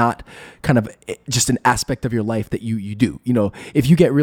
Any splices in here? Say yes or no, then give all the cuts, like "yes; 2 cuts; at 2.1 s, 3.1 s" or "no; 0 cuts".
no; 0 cuts